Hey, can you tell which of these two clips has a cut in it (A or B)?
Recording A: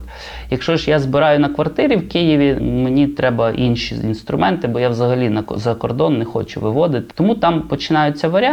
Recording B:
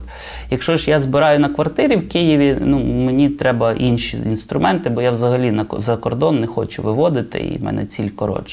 A